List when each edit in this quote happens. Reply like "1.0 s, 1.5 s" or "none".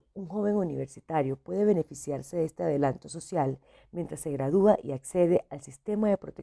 none